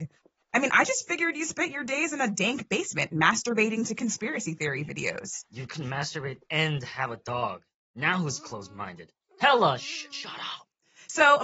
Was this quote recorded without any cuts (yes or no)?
yes